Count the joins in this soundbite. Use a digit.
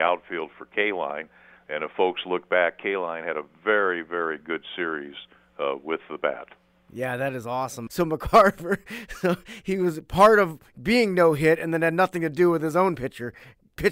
1